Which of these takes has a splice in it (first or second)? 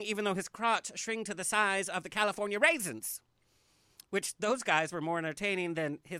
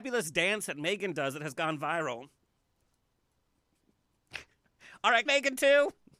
second